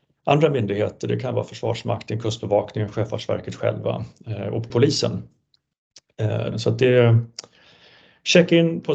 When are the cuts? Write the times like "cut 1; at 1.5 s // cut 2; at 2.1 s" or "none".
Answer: cut 1; at 4.7 s // cut 2; at 6.5 s